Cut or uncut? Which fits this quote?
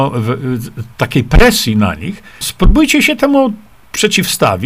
cut